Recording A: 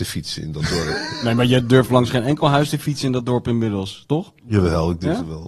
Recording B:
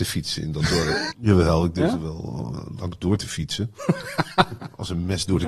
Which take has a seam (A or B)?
B